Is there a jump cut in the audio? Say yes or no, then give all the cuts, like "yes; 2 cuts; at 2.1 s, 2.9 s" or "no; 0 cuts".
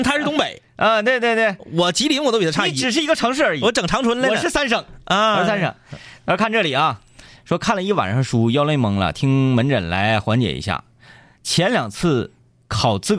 no; 0 cuts